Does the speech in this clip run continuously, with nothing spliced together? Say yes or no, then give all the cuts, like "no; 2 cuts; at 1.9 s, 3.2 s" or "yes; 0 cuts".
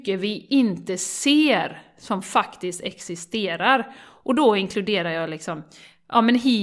yes; 0 cuts